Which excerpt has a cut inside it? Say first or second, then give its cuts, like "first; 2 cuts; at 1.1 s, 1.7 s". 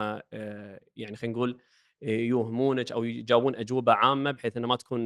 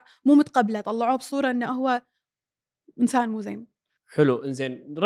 second; 1 cut; at 4.0 s